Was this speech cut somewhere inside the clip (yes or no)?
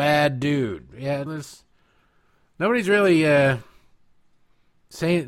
yes